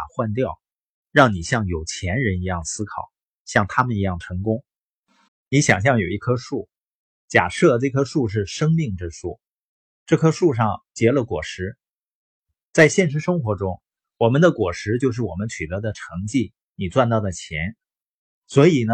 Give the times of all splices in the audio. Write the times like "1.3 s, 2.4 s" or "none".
5.3 s